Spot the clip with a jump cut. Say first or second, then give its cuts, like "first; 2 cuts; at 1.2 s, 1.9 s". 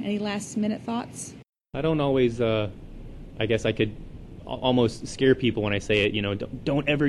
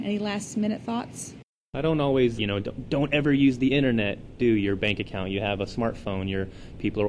second; 2 cuts; at 2.4 s, 4.4 s